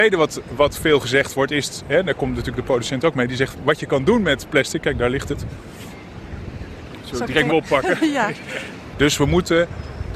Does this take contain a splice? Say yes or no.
yes